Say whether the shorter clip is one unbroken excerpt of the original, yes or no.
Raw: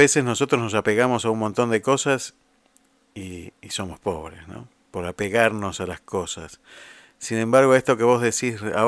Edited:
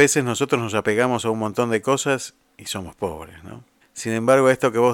no